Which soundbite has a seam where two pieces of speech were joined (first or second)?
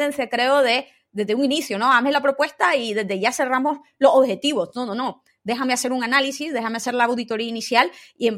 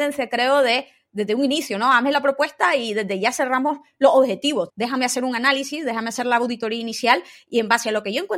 second